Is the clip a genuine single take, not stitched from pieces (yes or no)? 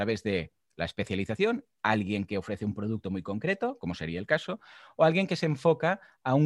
yes